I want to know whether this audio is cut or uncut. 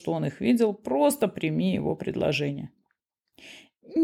uncut